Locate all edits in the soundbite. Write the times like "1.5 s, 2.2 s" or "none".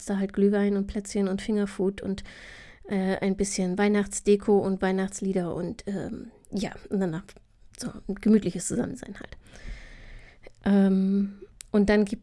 none